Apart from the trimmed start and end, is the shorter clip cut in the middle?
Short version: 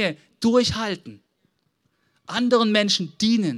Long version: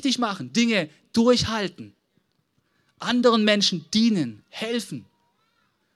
no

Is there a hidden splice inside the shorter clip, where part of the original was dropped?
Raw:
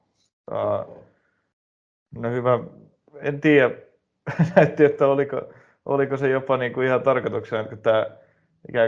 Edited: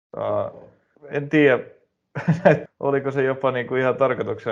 yes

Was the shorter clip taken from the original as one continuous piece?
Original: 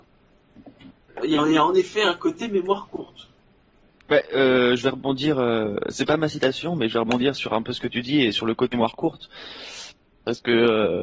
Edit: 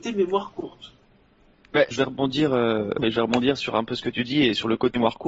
no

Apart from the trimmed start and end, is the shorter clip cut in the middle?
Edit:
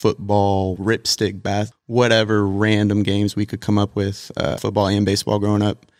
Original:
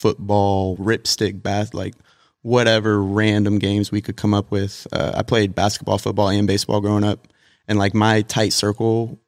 yes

